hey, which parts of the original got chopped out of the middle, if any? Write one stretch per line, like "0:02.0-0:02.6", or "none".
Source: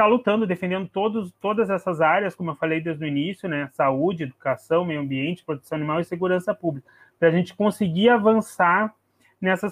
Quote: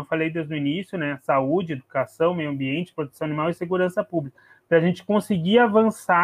none